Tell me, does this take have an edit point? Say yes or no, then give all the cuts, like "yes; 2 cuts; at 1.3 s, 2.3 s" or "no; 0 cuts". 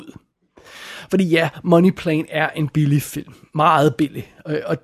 no; 0 cuts